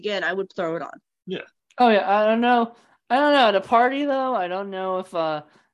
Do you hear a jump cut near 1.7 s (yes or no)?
yes